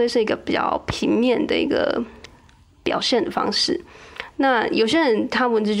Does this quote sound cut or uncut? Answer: uncut